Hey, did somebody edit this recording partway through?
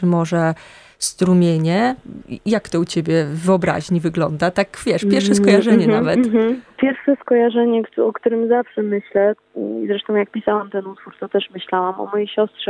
no; 0 cuts

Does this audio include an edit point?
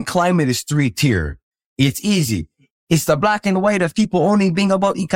yes; 1 cut; at 2.7 s

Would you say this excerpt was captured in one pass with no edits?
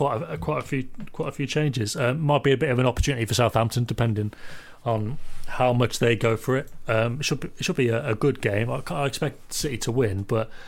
yes; 0 cuts

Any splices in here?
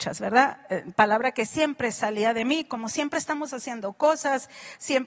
no; 0 cuts

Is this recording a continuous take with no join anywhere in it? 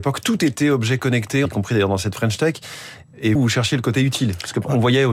no; 2 cuts; at 1.5 s, 3.4 s

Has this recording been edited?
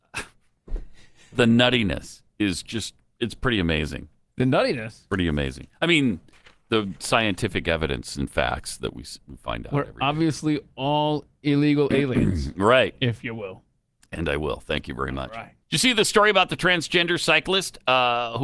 yes; 1 cut; at 15.6 s

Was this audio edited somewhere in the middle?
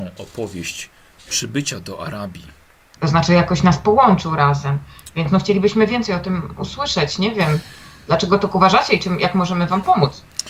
yes; 1 cut; at 3.0 s

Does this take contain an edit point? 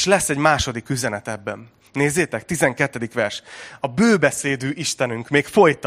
no; 0 cuts

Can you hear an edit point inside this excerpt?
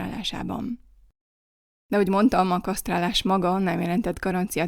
no; 0 cuts

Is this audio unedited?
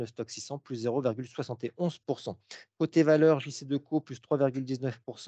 yes; 0 cuts

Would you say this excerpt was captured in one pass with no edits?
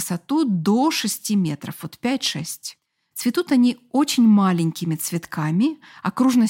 yes; 0 cuts

